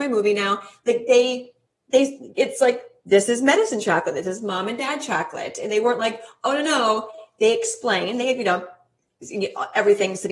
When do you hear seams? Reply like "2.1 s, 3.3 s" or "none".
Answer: none